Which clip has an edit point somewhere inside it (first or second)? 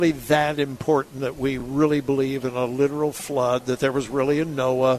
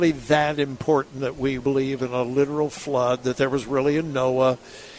second